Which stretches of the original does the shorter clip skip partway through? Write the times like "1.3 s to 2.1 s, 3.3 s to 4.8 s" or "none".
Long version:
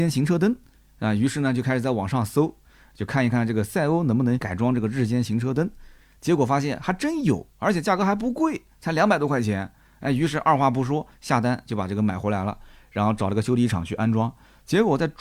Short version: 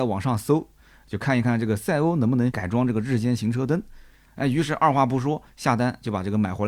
6.1 s to 9.9 s